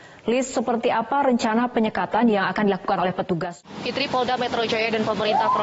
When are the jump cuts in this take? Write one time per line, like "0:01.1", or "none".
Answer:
none